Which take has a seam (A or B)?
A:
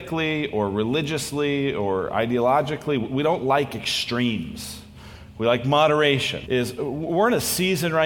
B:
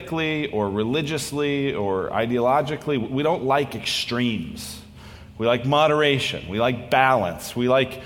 A